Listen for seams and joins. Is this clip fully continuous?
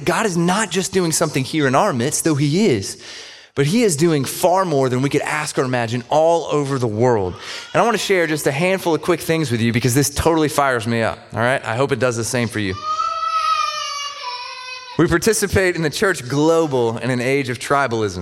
no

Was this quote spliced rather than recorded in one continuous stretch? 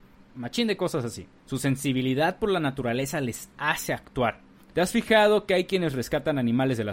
yes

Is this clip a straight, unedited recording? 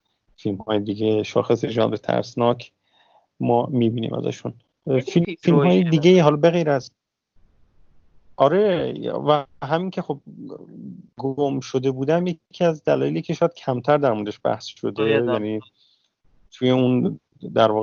no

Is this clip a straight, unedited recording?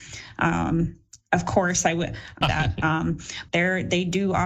no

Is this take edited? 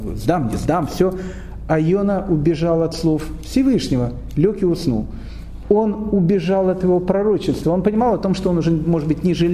yes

